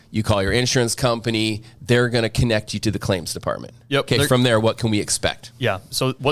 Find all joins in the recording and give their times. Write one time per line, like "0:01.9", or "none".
none